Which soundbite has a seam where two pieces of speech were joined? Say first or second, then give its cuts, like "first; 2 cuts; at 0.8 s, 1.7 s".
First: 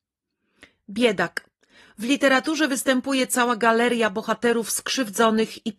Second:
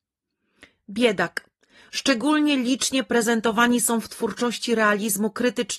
second; 1 cut; at 1.9 s